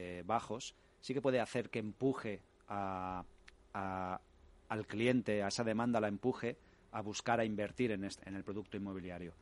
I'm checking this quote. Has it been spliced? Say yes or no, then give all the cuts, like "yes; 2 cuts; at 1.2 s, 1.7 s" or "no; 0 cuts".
yes; 1 cut; at 8.2 s